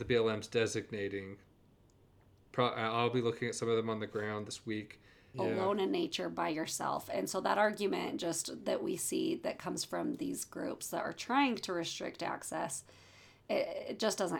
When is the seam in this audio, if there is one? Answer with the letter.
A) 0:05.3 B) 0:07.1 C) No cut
A